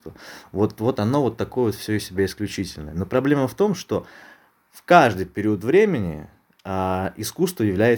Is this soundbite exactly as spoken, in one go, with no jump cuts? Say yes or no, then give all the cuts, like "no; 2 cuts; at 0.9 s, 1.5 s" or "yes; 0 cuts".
yes; 0 cuts